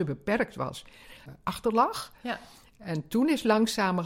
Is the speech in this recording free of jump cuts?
no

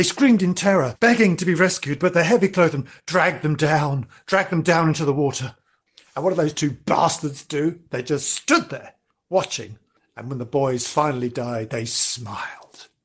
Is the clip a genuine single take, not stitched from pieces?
yes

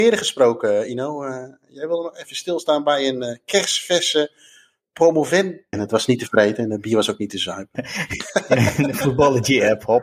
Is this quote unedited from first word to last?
no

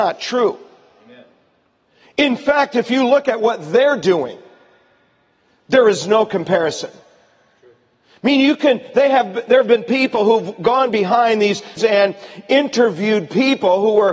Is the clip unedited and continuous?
no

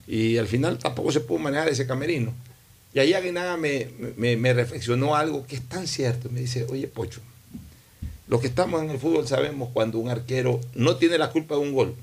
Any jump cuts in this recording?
yes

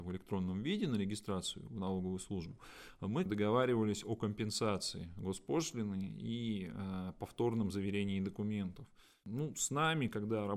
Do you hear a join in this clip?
yes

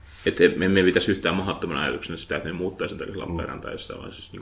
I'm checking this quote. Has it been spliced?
no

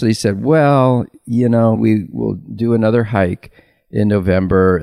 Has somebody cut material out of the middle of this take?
yes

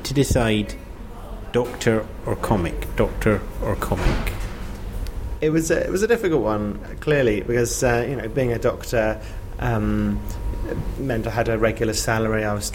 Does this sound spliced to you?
no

